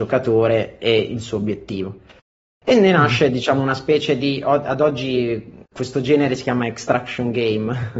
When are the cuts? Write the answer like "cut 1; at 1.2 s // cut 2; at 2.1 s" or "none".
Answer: none